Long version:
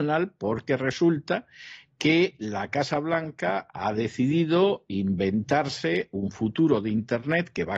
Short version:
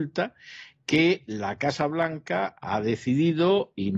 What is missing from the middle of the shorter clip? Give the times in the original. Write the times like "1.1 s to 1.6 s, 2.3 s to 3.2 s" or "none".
none